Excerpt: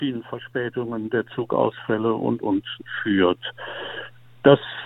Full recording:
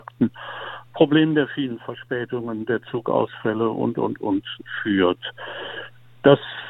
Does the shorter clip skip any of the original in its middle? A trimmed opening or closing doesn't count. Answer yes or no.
yes